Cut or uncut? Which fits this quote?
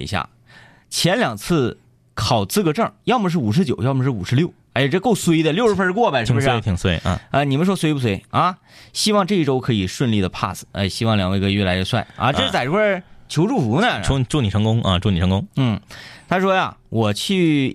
uncut